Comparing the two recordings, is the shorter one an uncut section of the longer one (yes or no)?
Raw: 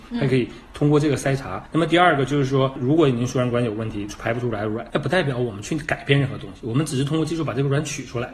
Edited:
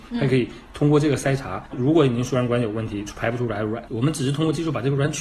no